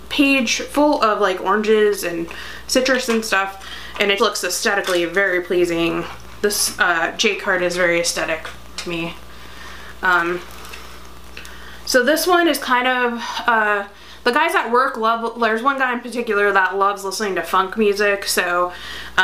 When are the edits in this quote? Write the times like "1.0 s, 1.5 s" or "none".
4.2 s